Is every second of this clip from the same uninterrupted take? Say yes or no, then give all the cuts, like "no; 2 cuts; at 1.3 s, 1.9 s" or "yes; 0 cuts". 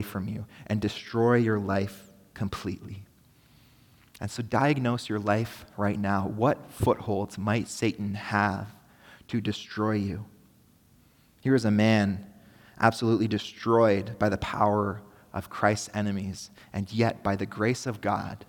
yes; 0 cuts